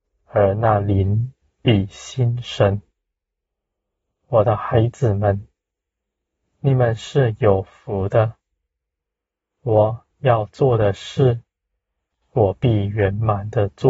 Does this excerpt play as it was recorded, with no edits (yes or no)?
yes